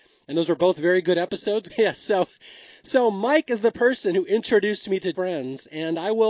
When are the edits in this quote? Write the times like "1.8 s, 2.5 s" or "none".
1.7 s, 5.1 s